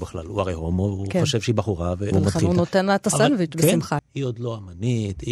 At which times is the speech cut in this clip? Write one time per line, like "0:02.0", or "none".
0:02.1
0:04.0